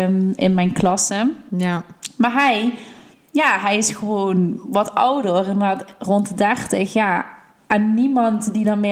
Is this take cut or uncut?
uncut